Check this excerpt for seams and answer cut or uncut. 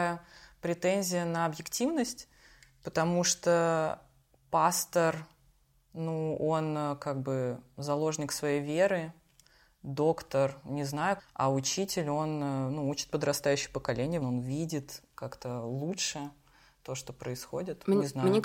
cut